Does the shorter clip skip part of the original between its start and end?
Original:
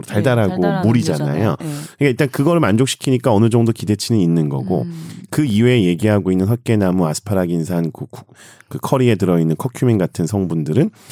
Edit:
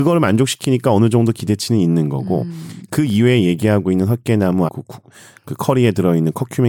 yes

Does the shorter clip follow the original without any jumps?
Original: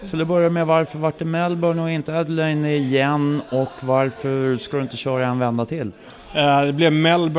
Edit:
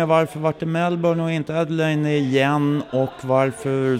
yes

